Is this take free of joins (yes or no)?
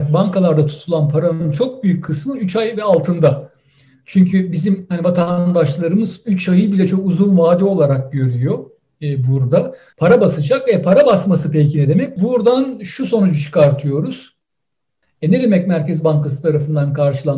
no